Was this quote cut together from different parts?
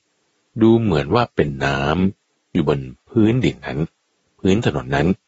no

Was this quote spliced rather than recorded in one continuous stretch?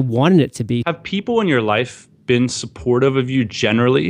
no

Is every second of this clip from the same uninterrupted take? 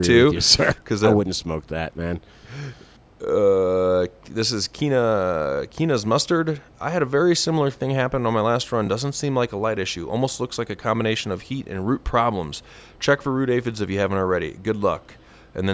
yes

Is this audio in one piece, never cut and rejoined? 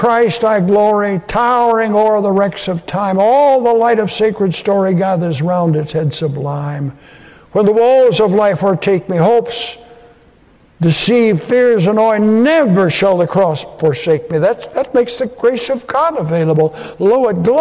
yes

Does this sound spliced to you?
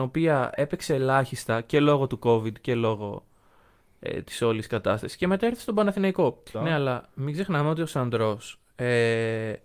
yes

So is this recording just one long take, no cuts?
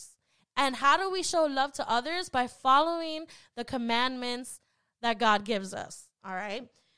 yes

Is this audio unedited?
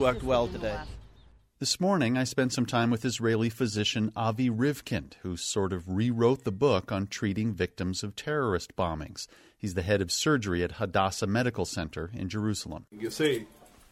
yes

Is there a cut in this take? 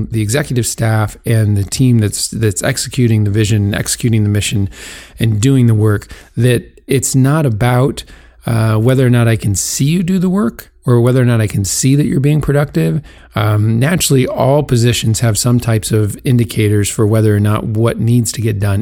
yes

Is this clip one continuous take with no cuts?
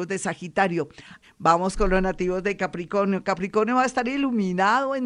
no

